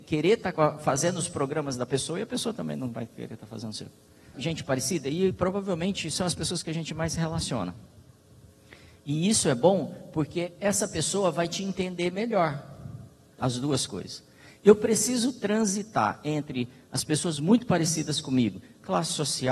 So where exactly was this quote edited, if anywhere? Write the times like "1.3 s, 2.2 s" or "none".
4.3 s, 13.4 s

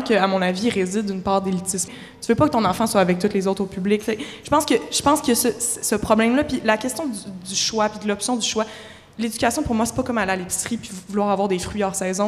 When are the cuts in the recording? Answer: 1.9 s

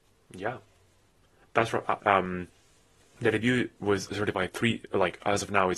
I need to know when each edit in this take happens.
2.0 s, 4.1 s

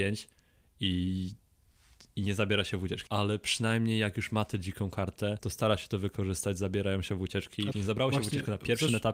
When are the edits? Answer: 3.1 s, 7.7 s

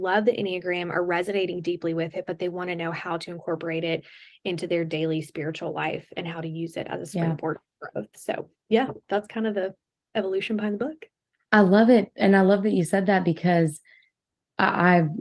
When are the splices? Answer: none

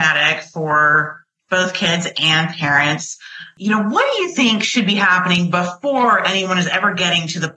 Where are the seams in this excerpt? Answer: none

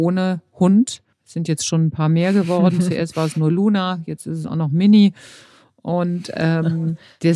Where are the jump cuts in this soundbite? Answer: 1.1 s

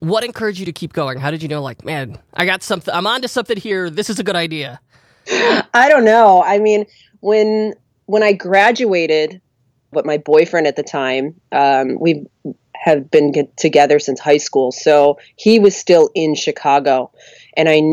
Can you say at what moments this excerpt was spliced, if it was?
9.9 s

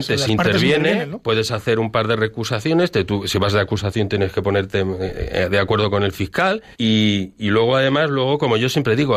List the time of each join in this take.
6.7 s

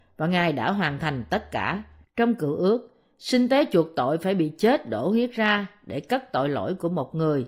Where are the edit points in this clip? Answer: 2.0 s

